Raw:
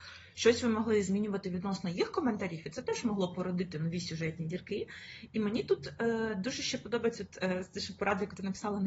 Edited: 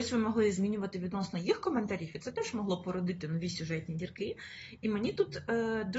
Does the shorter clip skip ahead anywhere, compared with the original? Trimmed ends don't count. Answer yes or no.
no